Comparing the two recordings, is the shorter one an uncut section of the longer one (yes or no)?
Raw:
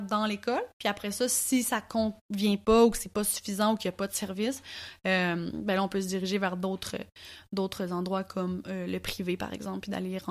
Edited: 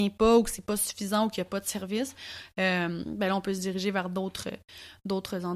yes